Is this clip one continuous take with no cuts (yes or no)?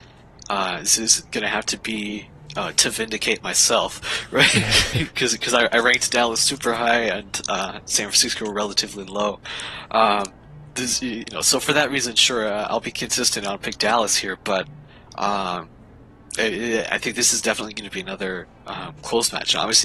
yes